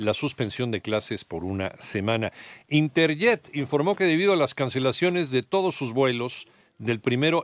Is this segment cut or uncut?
uncut